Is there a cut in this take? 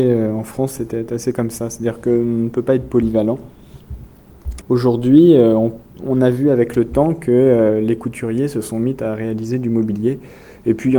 yes; 1 cut; at 4.6 s

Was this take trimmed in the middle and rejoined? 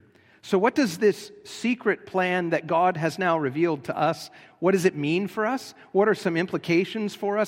no; 0 cuts

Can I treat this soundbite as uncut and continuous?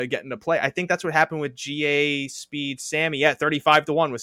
yes; 0 cuts

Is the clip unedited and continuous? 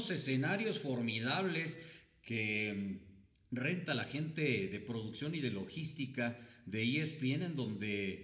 yes; 0 cuts

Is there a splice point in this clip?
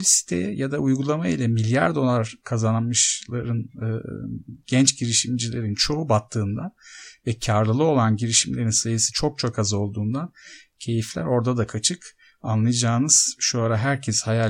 no; 0 cuts

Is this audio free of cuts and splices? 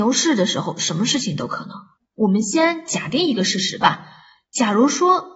no; 1 cut; at 2.0 s

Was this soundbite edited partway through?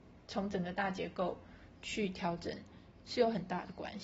no; 0 cuts

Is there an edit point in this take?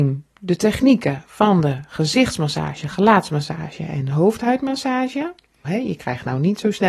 yes; 1 cut; at 5.6 s

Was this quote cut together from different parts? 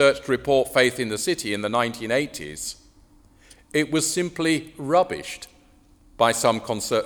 no; 0 cuts

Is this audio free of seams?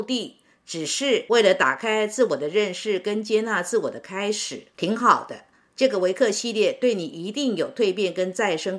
yes; 0 cuts

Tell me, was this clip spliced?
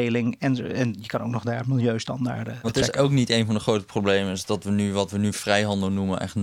yes; 1 cut; at 2.6 s

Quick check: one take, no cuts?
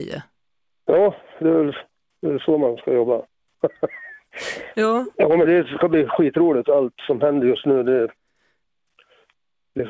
no; 1 cut; at 5.5 s

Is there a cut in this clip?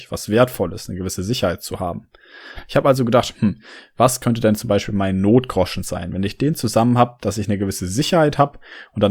no; 0 cuts

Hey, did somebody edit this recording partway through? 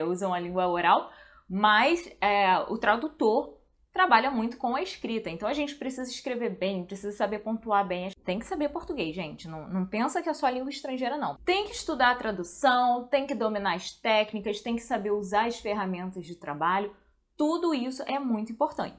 yes; 1 cut; at 11.4 s

